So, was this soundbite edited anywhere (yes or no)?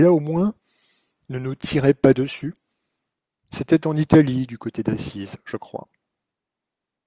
no